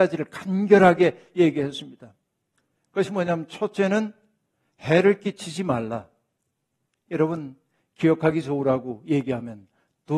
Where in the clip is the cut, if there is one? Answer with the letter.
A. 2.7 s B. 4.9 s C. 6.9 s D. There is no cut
D